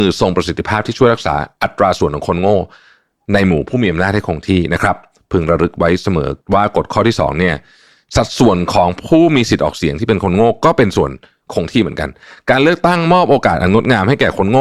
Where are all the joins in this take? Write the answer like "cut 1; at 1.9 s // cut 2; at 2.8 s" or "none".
none